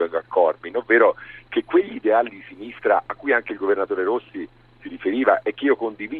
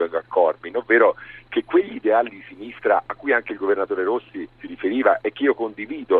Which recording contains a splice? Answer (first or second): second